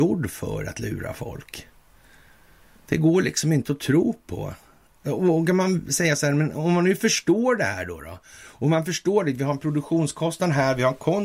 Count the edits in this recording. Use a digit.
0